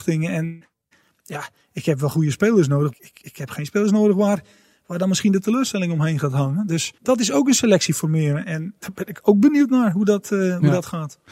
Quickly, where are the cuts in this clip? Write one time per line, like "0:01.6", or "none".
0:02.9
0:07.0
0:08.8